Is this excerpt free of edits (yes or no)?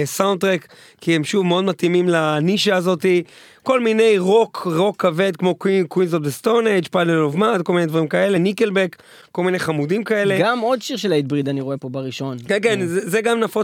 yes